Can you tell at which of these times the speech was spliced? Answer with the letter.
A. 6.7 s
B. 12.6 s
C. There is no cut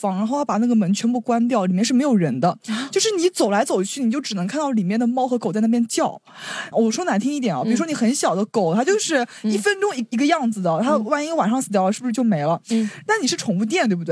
A